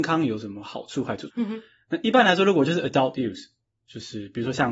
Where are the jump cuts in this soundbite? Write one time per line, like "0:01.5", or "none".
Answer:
0:01.3